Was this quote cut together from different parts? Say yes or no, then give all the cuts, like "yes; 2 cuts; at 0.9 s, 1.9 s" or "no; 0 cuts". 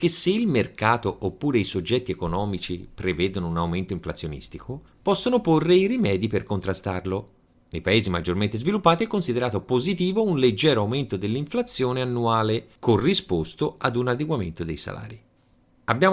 no; 0 cuts